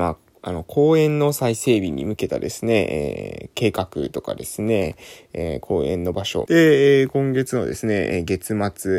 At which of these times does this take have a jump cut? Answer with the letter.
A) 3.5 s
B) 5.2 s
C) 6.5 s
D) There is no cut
C